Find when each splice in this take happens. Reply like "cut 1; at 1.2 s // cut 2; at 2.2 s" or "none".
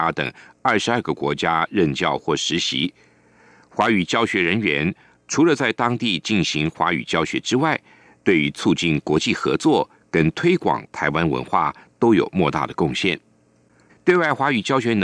cut 1; at 13.9 s